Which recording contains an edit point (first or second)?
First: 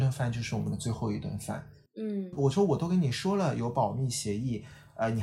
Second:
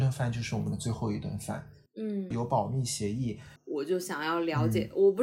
second